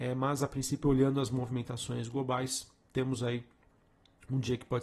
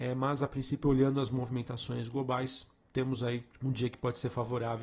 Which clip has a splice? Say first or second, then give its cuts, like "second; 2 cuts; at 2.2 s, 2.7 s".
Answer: second; 1 cut; at 3.5 s